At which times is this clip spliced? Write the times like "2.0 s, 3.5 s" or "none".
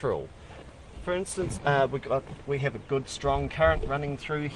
1.6 s